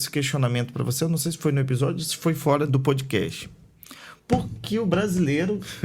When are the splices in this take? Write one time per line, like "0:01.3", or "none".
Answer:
0:02.7
0:04.6